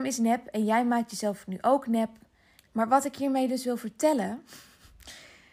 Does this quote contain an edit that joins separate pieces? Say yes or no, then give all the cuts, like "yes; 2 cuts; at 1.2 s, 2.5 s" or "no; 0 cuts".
yes; 1 cut; at 2.6 s